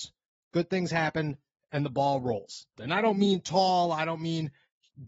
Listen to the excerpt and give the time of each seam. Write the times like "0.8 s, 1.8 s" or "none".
2.8 s